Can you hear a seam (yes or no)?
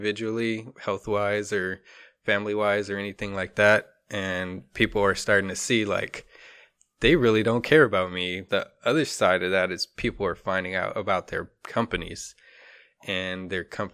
yes